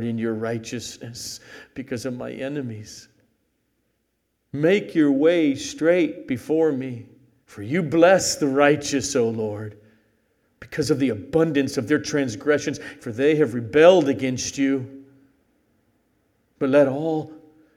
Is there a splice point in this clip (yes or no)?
yes